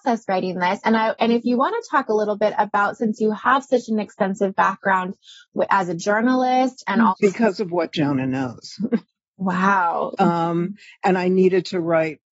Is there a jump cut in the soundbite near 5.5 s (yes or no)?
no